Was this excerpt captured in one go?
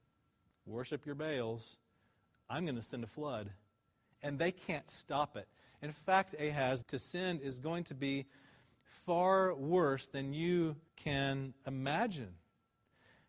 no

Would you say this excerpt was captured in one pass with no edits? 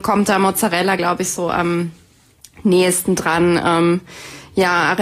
yes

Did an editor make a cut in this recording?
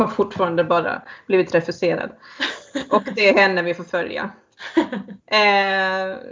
no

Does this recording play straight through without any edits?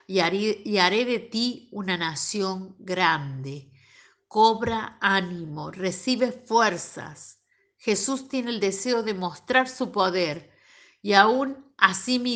yes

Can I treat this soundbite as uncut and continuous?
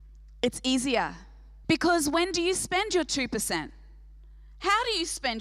no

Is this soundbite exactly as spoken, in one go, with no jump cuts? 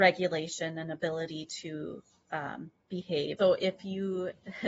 no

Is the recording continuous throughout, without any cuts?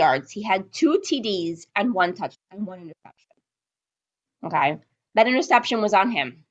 yes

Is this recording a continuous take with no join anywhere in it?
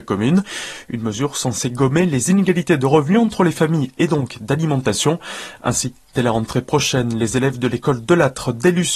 yes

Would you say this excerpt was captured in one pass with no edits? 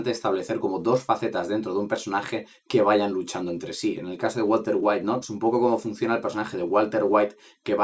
no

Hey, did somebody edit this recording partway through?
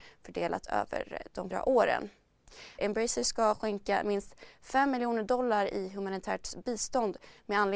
yes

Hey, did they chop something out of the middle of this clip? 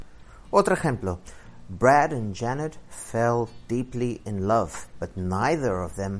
no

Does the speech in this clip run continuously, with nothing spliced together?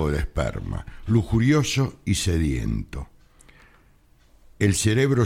yes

